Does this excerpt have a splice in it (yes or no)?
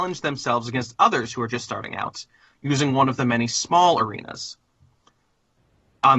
no